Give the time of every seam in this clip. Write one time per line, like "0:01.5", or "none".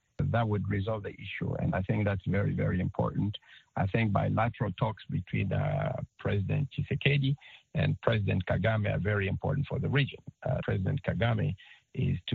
0:06.7
0:10.6